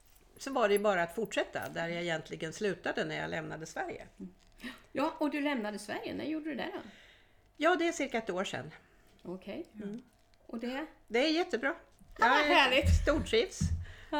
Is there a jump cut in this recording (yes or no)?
no